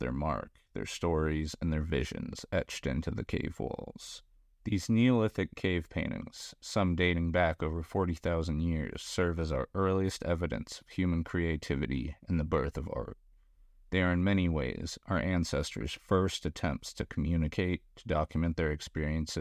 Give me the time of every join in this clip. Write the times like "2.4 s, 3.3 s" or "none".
none